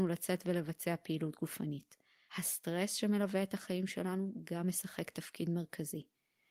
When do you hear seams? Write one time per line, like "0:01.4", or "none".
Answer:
none